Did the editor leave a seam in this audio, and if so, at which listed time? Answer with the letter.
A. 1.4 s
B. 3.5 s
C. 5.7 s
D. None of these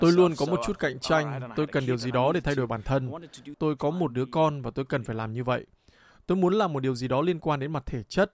B